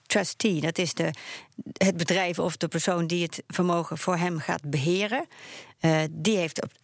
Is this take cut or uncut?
uncut